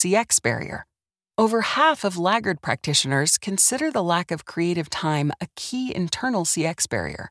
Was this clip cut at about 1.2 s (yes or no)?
yes